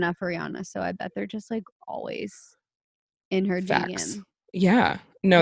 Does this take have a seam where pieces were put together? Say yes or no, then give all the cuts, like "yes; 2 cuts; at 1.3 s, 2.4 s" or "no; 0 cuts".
no; 0 cuts